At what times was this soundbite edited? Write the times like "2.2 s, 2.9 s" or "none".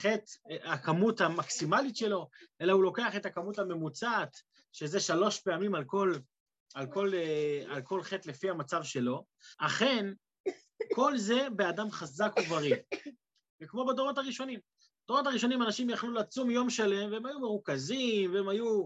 9.5 s, 13.5 s